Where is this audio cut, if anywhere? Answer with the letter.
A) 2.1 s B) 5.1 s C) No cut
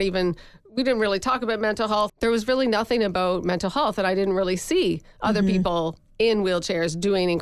A